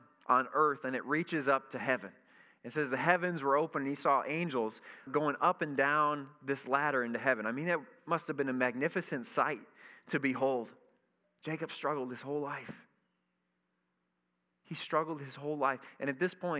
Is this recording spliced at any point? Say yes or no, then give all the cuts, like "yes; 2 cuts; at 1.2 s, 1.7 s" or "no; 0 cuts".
yes; 2 cuts; at 5.1 s, 11.2 s